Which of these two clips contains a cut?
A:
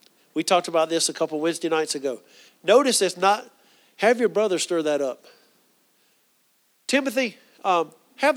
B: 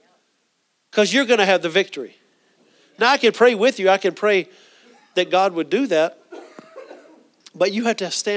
A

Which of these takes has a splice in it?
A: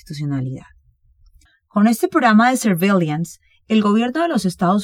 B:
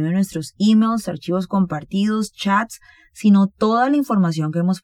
A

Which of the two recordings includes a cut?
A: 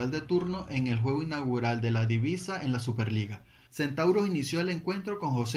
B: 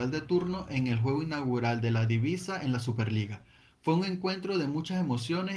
A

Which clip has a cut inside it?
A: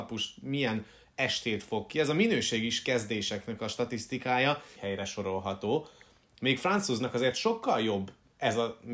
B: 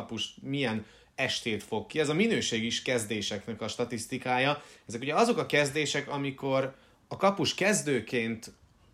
A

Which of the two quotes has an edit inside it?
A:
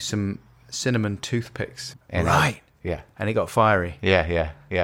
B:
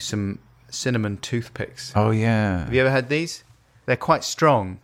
A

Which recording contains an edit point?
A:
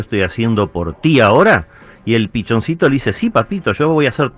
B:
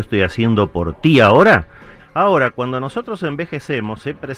B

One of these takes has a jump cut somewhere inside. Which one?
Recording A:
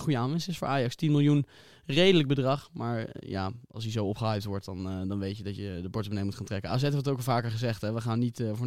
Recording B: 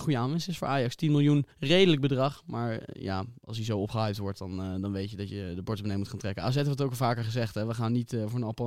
B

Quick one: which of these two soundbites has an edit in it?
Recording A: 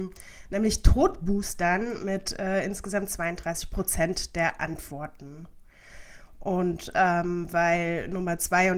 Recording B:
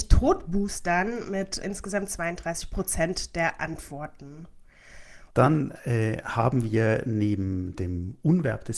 B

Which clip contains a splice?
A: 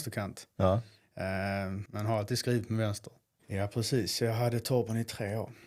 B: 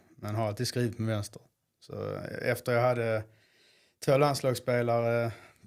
A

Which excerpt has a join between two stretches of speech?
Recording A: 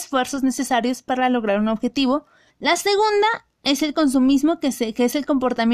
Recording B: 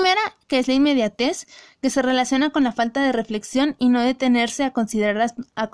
A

